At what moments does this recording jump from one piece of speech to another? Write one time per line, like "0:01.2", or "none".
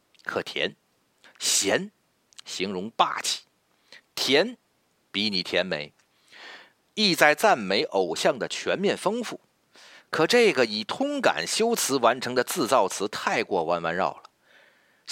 0:01.2
0:06.9